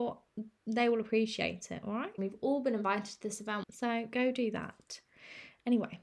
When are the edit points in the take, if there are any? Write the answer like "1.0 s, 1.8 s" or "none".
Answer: 2.2 s, 3.6 s